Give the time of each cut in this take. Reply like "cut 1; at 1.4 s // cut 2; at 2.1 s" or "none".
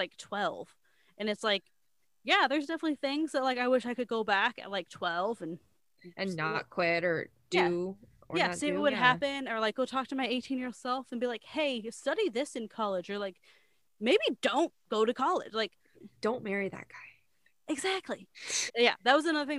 cut 1; at 15.9 s // cut 2; at 18.7 s